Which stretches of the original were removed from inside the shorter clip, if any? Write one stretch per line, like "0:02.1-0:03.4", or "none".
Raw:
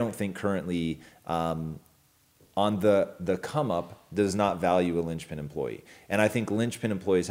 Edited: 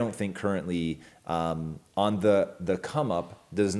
0:01.9-0:02.5